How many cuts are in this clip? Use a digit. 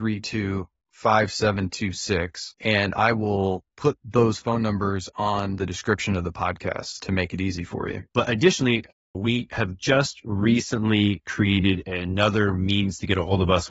2